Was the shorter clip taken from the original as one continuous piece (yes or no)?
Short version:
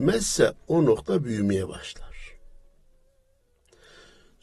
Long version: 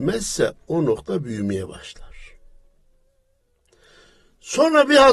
yes